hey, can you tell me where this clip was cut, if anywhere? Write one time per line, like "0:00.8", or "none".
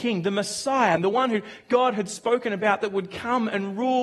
0:01.0